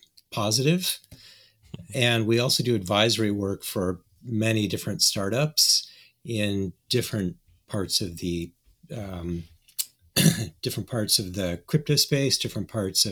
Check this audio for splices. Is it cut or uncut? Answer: uncut